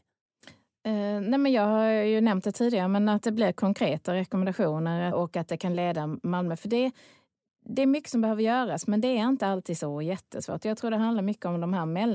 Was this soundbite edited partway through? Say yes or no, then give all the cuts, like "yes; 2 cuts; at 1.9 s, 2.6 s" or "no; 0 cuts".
yes; 1 cut; at 5.1 s